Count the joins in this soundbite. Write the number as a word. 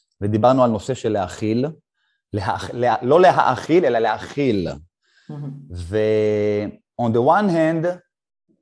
zero